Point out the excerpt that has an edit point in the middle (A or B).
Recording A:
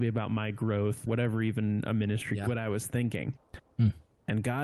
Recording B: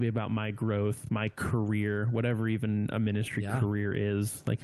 A